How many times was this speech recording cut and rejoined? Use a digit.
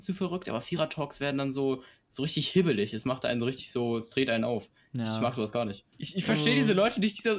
1